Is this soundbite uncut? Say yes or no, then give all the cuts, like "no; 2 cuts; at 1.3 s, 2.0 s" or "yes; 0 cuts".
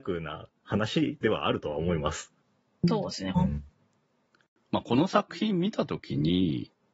no; 1 cut; at 3.4 s